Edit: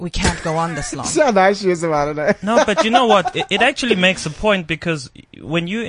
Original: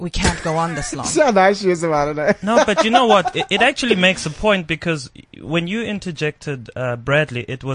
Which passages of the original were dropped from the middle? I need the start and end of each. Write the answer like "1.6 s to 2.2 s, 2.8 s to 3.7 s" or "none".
none